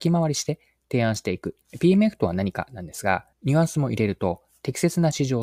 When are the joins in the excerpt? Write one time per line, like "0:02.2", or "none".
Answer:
0:01.6
0:03.3